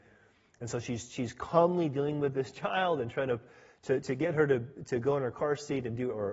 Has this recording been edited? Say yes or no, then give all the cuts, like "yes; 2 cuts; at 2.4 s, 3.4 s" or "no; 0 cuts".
no; 0 cuts